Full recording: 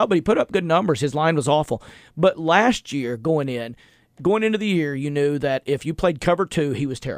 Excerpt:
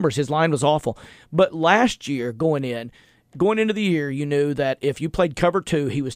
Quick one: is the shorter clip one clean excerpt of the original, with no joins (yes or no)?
yes